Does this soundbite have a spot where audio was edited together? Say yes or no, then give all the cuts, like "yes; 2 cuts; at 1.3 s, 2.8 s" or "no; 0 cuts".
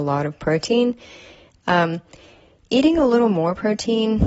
no; 0 cuts